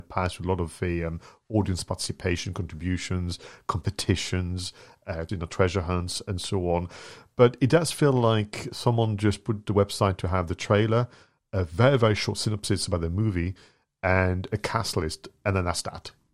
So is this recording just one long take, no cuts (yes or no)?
no